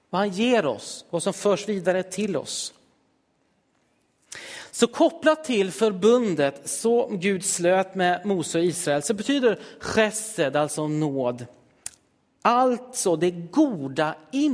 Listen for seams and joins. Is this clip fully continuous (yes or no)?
yes